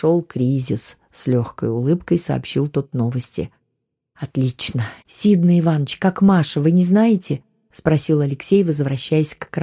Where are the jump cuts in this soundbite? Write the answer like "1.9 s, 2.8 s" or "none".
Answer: 5.0 s

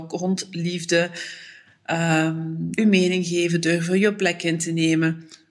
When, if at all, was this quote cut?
2.8 s

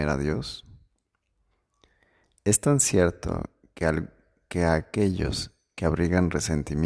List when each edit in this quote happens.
none

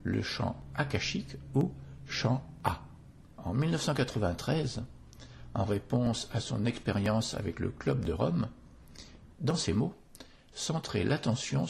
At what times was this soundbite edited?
3.3 s, 9.3 s

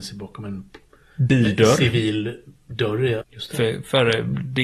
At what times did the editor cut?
3.2 s

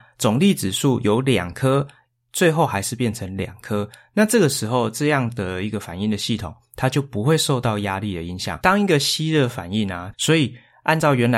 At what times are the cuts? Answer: 8.6 s, 10.1 s

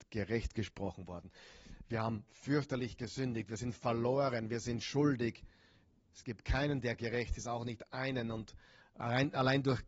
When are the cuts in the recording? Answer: none

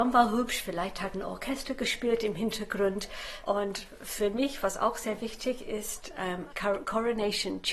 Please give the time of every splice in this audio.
3.4 s, 6.5 s

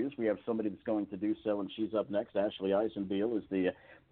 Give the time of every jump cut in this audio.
none

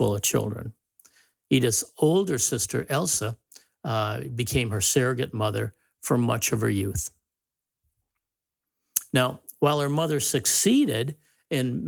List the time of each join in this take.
none

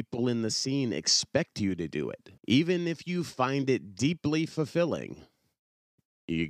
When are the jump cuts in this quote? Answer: 2.4 s

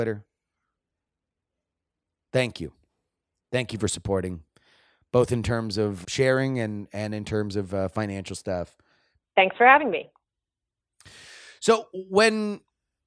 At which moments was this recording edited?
6.0 s, 9.2 s

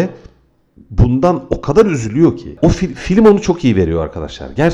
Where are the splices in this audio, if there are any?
none

